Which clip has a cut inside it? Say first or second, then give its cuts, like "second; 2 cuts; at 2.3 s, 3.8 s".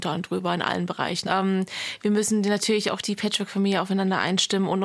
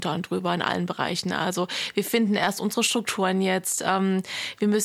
first; 1 cut; at 1.3 s